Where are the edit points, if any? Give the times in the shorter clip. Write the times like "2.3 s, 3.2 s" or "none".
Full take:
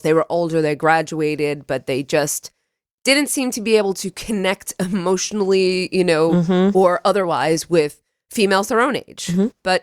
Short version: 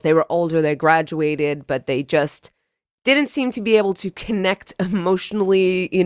none